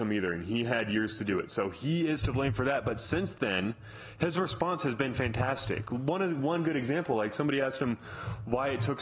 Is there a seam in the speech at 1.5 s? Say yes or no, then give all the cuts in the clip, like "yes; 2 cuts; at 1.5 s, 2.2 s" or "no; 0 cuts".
no; 0 cuts